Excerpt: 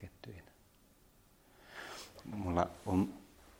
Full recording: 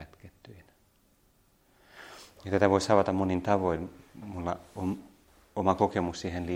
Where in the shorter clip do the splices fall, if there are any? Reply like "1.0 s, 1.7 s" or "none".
2.2 s